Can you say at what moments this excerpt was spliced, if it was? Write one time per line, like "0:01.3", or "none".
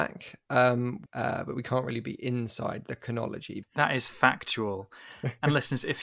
0:01.1
0:03.6